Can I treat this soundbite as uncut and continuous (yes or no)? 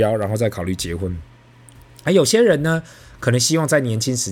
yes